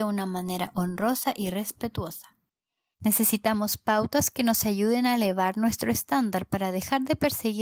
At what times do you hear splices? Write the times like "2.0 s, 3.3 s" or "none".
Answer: 2.9 s